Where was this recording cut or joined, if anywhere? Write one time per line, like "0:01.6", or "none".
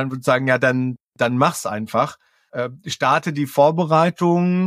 none